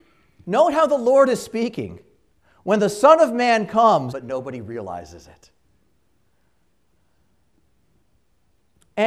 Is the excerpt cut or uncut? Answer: cut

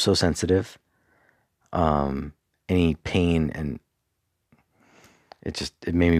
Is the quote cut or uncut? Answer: uncut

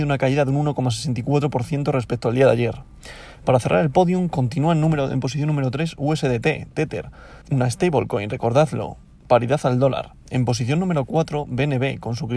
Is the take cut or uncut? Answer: cut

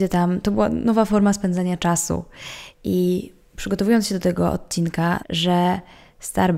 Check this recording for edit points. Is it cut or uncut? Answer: cut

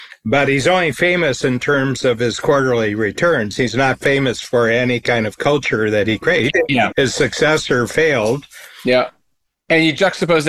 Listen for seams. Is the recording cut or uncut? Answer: cut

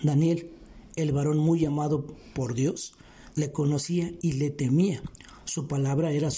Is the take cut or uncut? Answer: cut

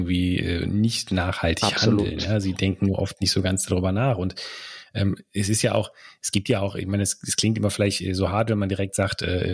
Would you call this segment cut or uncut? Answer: uncut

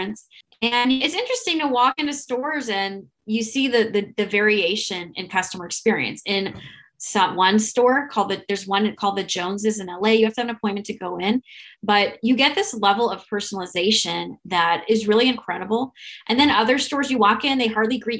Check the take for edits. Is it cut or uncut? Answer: uncut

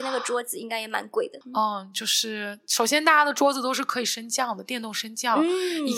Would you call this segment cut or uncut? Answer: cut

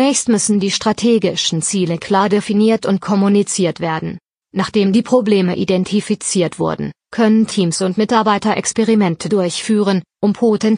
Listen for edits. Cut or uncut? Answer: cut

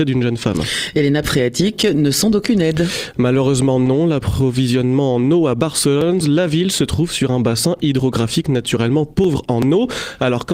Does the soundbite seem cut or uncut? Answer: cut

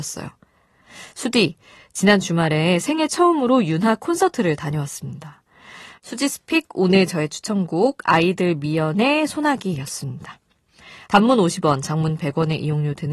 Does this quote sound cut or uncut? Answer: cut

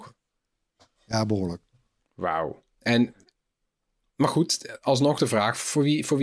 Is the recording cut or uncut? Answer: cut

